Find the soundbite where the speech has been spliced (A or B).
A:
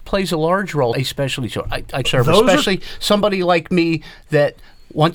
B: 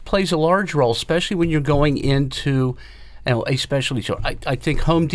A